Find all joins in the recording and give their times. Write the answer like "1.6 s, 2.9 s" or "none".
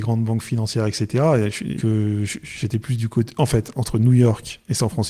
1.8 s